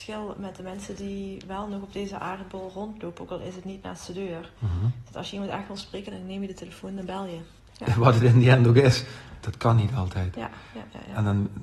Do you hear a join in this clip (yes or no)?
yes